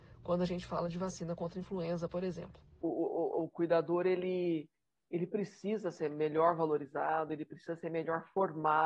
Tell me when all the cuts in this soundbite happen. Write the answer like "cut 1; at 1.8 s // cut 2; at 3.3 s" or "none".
none